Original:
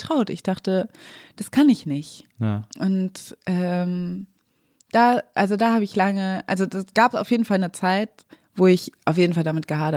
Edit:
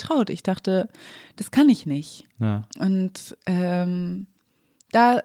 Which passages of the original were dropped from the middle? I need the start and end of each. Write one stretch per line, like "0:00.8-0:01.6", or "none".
none